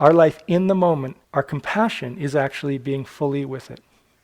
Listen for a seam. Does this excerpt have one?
yes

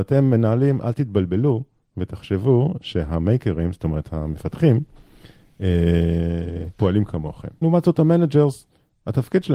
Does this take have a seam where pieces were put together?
yes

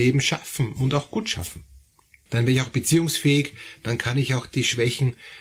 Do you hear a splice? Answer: yes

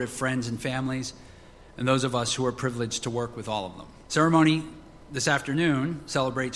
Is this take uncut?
yes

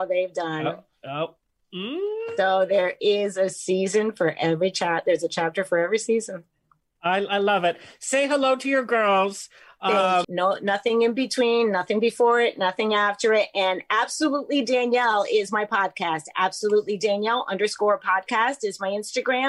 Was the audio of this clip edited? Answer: yes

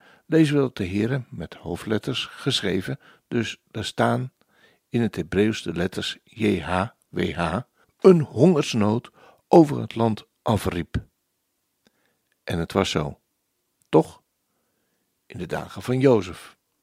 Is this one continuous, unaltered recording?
no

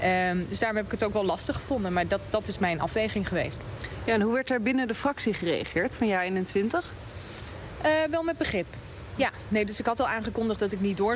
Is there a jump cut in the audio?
no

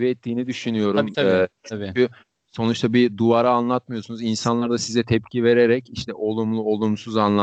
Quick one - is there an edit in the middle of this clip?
no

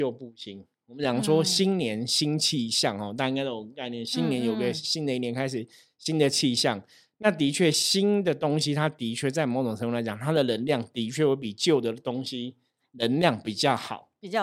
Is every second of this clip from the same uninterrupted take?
yes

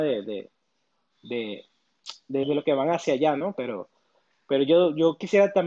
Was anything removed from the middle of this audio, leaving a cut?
yes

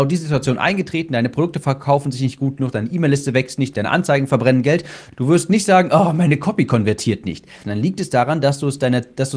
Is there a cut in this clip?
yes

